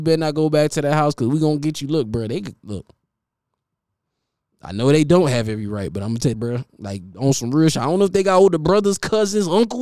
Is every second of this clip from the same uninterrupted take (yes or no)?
no